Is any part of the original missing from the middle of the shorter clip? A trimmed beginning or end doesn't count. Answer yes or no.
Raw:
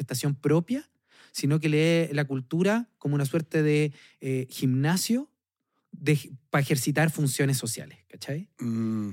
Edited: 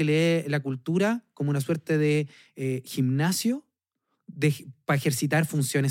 no